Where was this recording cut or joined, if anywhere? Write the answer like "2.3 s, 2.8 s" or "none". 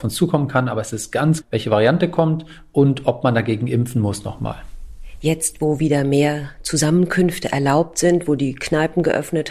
1.4 s